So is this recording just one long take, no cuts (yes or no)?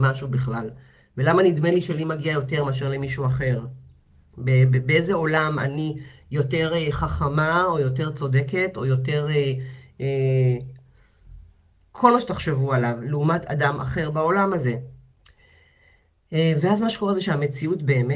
yes